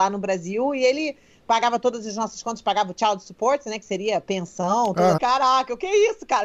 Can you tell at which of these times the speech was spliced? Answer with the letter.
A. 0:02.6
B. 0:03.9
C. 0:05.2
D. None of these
C